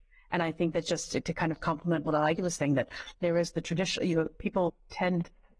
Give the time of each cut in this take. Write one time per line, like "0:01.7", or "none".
none